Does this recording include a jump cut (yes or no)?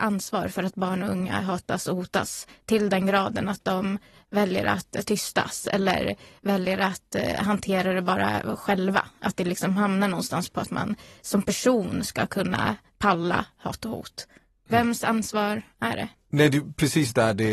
no